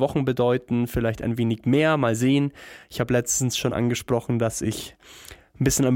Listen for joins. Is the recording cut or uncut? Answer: uncut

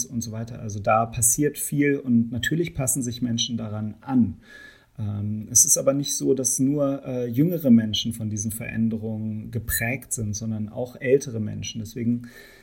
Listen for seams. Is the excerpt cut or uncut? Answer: uncut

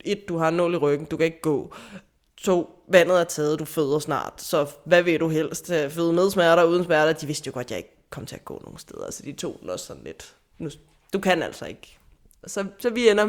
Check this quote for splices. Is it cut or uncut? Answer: uncut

